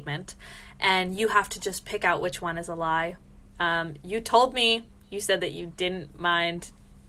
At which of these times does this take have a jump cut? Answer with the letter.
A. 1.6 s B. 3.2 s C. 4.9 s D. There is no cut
D